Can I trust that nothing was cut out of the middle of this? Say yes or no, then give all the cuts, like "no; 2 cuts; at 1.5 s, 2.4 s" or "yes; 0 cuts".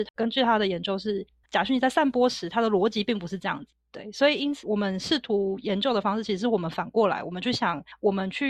no; 1 cut; at 1.4 s